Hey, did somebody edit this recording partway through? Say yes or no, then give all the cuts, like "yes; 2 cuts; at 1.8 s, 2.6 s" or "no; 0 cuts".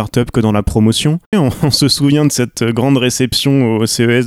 yes; 1 cut; at 1.3 s